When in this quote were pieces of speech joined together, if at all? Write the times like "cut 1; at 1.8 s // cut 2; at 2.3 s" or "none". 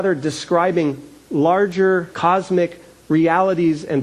cut 1; at 2.1 s

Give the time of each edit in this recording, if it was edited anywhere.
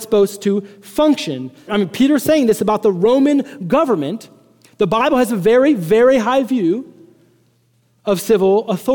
cut 1; at 1.7 s

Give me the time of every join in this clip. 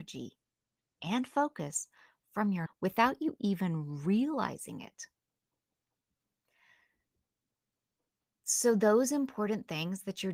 cut 1; at 2.7 s

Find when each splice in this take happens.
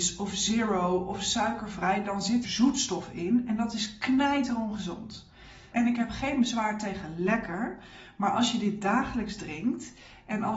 cut 1; at 2.4 s // cut 2; at 5.7 s

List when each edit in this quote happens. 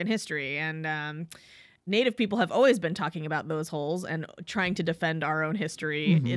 none

